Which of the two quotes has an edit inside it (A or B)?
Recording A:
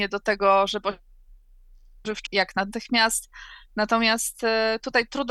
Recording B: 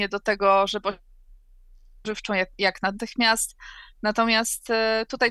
A